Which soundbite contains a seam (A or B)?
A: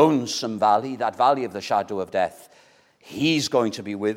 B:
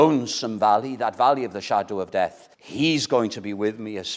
B